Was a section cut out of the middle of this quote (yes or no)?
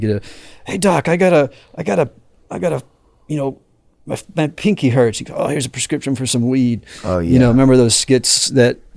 no